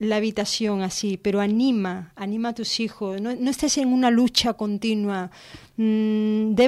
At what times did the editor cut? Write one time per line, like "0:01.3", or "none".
none